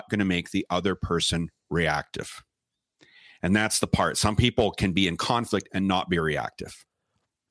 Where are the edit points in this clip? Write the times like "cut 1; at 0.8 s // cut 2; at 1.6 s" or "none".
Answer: none